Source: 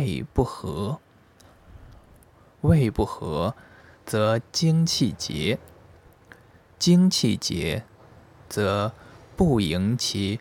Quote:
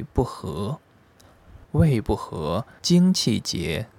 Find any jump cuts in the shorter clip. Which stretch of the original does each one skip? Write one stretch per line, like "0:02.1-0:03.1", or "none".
0:01.8-0:02.5
0:03.7-0:06.7